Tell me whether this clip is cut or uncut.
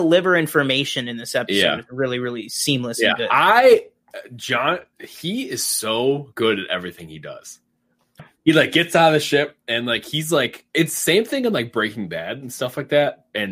cut